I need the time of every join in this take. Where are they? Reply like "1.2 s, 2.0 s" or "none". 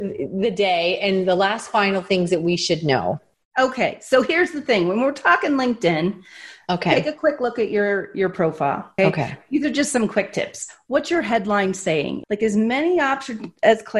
9.0 s, 12.2 s